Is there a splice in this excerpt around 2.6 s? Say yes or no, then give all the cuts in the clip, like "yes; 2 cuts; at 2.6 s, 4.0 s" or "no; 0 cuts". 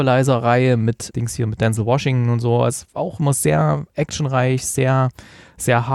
no; 1 cut; at 1.1 s